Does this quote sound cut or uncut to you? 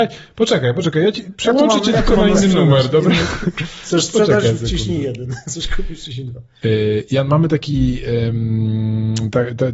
uncut